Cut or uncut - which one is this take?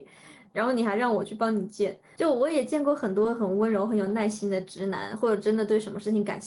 cut